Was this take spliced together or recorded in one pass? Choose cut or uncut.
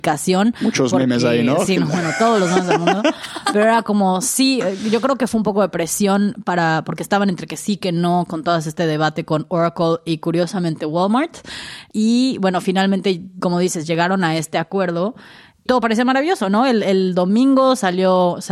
uncut